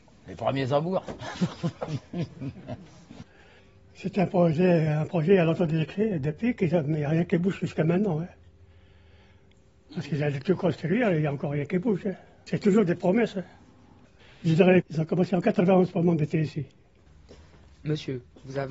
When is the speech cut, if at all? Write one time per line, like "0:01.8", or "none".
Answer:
0:14.8

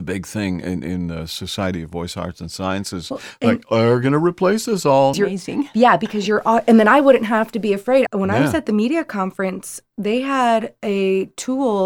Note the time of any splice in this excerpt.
0:05.1
0:08.1

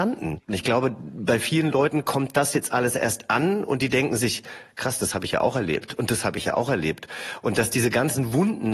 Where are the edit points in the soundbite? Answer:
none

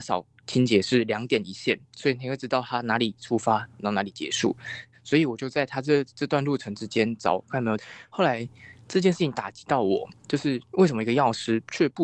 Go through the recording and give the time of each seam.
0:07.8

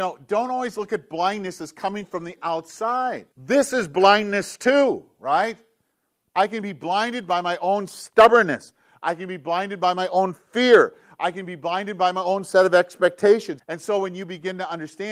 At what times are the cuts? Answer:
0:03.3
0:13.6

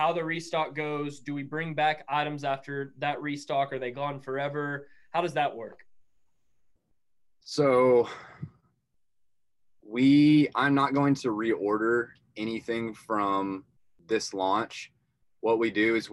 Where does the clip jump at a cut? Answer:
none

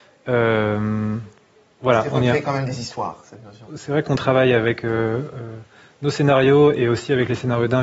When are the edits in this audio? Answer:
0:03.7

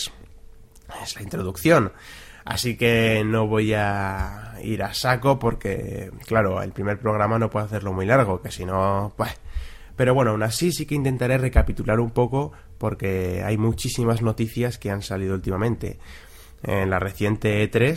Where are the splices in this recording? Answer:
none

